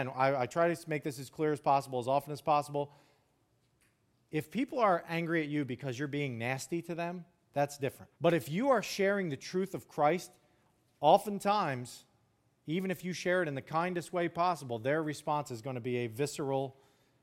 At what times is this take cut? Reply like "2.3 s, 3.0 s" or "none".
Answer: 8.1 s